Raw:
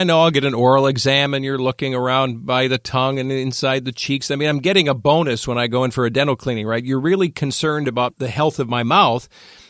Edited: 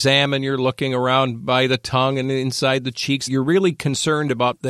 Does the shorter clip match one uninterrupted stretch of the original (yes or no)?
no